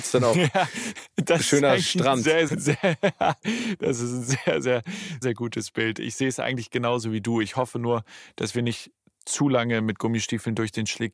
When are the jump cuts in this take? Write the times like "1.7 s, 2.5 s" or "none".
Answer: 2.5 s, 5.2 s